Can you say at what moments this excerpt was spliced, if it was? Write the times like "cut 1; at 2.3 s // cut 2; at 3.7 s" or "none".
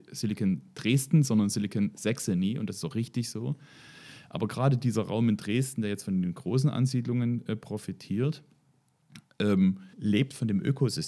cut 1; at 9.9 s

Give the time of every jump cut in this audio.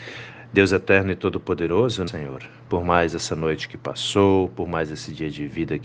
cut 1; at 2.1 s

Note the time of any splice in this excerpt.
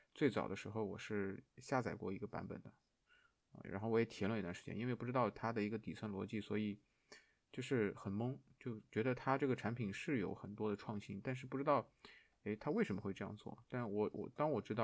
none

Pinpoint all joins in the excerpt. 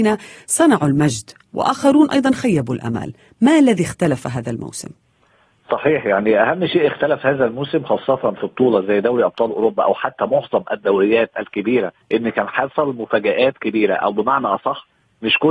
cut 1; at 12.0 s

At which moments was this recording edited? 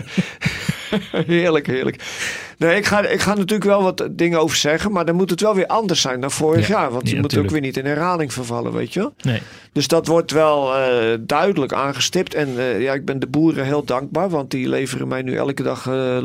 none

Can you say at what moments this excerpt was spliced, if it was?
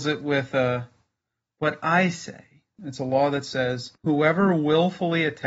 cut 1; at 2.8 s // cut 2; at 4.0 s

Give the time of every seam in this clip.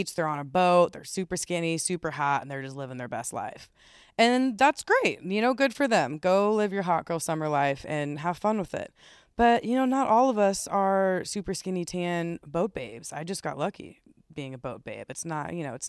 none

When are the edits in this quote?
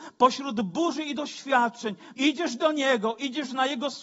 cut 1; at 2.1 s

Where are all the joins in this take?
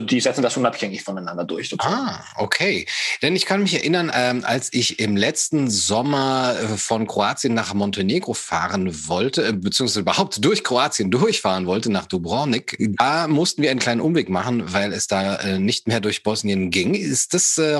cut 1; at 12.8 s

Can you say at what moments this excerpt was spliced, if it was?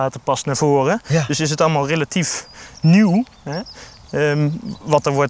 none

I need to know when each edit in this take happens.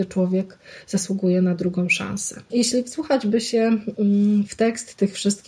cut 1; at 2.5 s

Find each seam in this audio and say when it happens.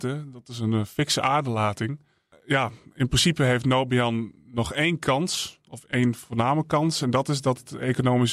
none

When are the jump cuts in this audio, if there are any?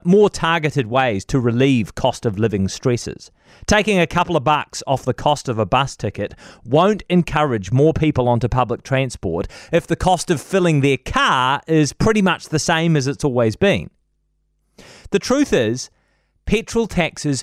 none

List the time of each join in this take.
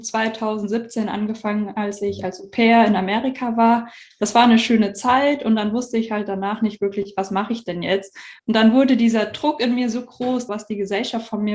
cut 1; at 8.4 s // cut 2; at 10.5 s

